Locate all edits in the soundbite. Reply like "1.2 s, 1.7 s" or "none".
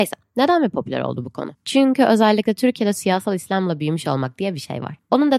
none